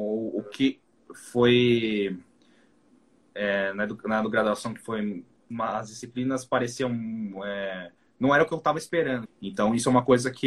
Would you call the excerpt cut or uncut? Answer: cut